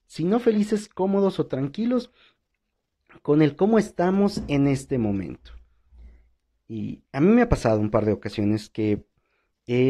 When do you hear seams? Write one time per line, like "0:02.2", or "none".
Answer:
none